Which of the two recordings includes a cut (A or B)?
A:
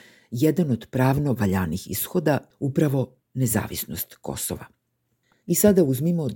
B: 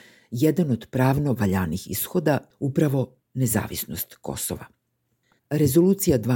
B